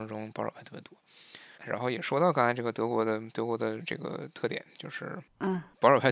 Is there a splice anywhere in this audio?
yes; 1 cut; at 1.6 s

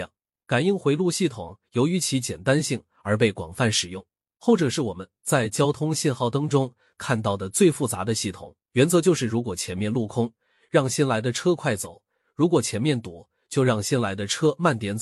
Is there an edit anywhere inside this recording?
yes; 1 cut; at 8.7 s

